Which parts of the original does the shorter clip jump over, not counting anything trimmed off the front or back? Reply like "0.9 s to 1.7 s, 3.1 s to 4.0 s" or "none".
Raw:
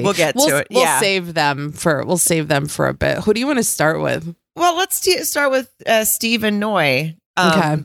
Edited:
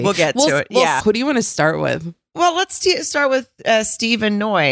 1.0 s to 3.2 s